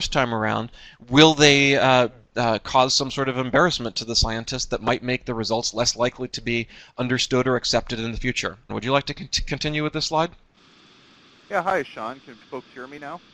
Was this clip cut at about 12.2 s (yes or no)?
no